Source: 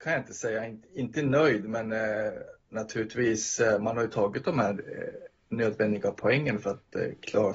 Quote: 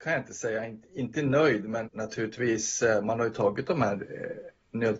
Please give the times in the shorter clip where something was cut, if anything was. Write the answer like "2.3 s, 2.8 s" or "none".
1.8 s